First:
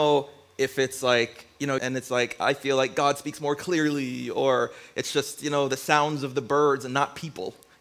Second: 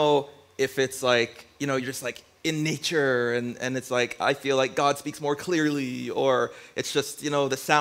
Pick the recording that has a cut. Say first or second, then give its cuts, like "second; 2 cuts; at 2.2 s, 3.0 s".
first; 1 cut; at 1.8 s